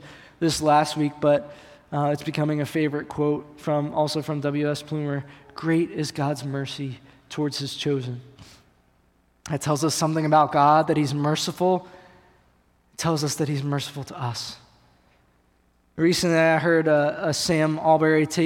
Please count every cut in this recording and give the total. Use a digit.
0